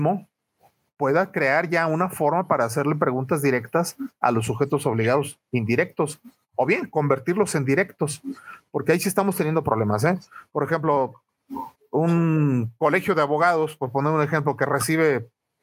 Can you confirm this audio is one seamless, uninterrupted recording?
no; 1 cut; at 11.8 s

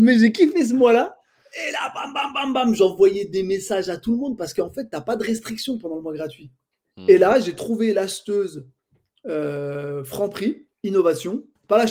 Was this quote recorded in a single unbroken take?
yes; 0 cuts

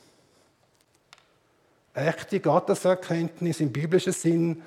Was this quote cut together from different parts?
yes; 1 cut; at 1.8 s

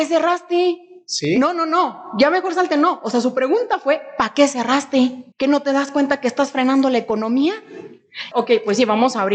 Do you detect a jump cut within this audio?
yes; 2 cuts; at 5.3 s, 8.3 s

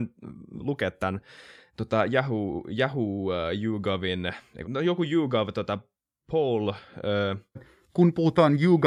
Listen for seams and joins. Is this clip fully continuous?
no; 2 cuts; at 4.6 s, 7.6 s

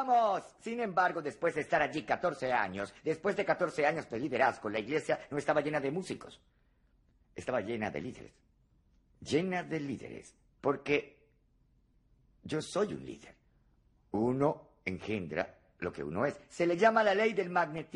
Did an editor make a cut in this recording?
no; 0 cuts

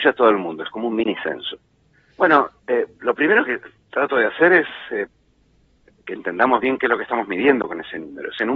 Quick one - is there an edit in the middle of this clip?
yes; 1 cut; at 2.1 s

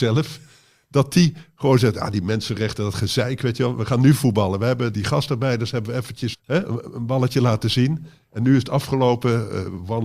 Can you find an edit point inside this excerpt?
yes; 2 cuts; at 4.9 s, 6.3 s

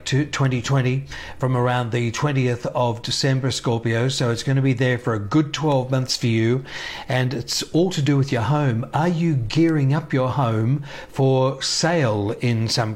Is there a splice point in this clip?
no; 0 cuts

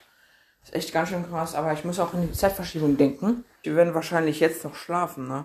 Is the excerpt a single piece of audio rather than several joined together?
no; 1 cut; at 3.6 s

